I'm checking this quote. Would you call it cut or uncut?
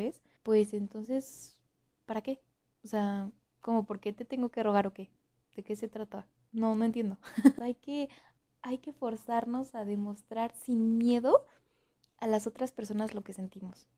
cut